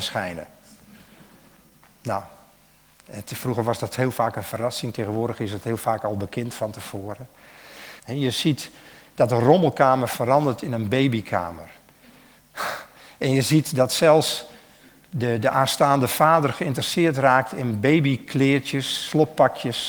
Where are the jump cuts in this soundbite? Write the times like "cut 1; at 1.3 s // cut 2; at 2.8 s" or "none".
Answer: cut 1; at 8.0 s